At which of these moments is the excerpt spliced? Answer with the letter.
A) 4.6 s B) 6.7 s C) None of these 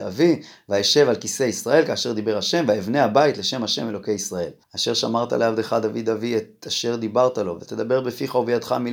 A